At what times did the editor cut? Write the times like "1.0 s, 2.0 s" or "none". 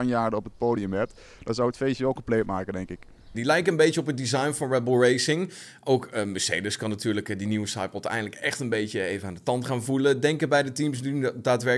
3.3 s